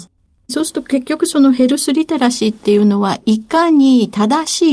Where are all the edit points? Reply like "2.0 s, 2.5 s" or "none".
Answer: none

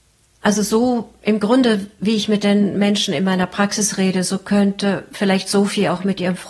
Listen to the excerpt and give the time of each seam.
none

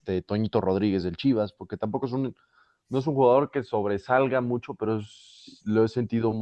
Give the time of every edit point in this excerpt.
none

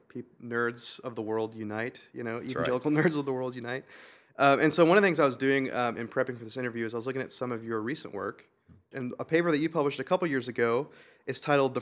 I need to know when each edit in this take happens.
8.9 s

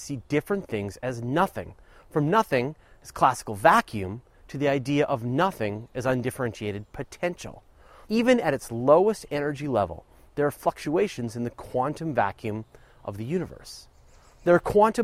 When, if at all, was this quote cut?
8.0 s

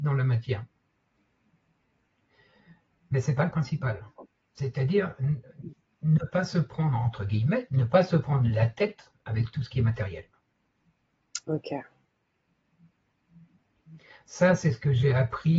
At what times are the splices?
none

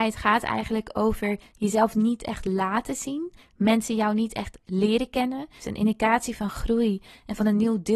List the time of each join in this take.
5.6 s

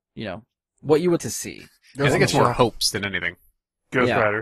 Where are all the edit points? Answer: 1.2 s

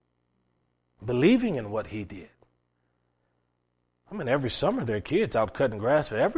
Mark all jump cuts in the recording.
none

